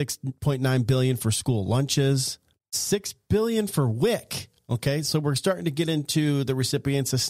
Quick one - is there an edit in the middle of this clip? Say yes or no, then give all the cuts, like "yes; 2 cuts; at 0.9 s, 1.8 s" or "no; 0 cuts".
no; 0 cuts